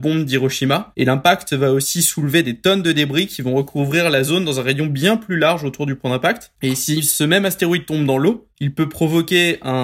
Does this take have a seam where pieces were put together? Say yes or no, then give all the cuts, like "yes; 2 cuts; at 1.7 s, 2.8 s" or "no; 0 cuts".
no; 0 cuts